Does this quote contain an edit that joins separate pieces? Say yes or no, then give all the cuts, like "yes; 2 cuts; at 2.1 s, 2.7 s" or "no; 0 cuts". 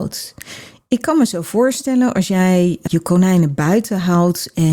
yes; 1 cut; at 2.9 s